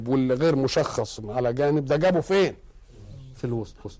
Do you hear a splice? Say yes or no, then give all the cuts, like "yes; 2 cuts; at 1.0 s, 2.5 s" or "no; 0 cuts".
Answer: no; 0 cuts